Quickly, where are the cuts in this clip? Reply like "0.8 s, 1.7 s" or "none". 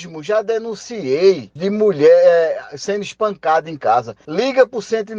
1.6 s